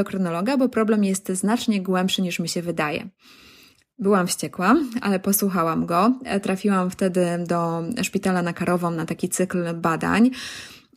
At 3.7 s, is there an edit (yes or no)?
no